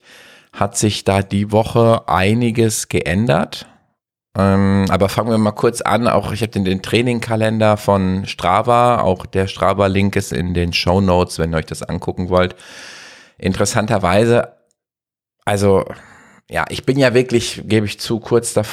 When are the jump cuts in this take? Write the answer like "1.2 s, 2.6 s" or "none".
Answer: none